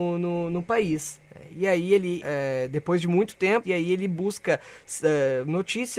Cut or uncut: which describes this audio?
cut